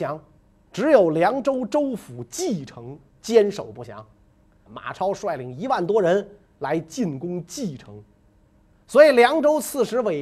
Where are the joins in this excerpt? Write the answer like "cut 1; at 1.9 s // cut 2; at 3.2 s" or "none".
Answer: cut 1; at 4.7 s